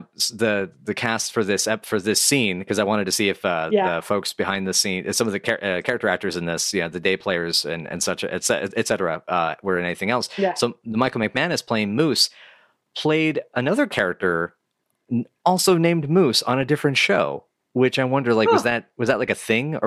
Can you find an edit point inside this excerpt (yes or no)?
no